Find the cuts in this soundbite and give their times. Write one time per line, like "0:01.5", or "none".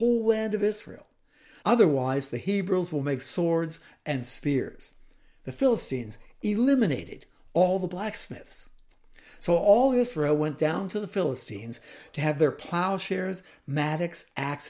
0:01.6